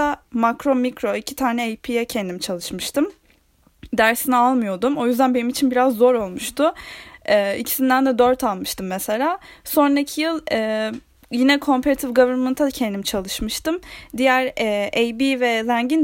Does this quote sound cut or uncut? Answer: uncut